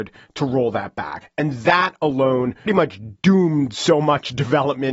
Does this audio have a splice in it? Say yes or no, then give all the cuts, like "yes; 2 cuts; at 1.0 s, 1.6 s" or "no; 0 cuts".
yes; 2 cuts; at 1.2 s, 2.7 s